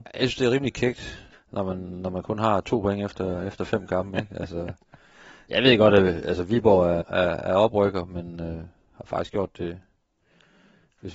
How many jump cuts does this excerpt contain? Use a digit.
2